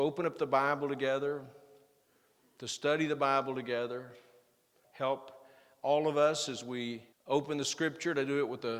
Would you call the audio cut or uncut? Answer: cut